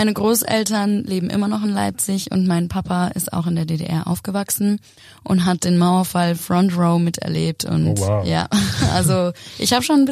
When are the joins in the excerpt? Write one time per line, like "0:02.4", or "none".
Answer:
none